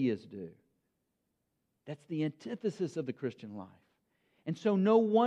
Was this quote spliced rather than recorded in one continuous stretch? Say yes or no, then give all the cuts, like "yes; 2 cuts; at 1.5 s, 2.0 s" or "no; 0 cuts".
no; 0 cuts